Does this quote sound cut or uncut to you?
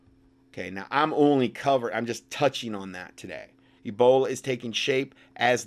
cut